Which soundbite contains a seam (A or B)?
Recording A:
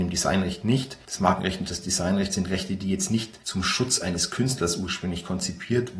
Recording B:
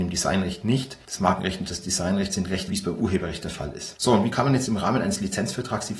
B